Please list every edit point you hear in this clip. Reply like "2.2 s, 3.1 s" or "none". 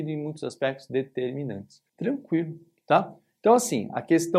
1.9 s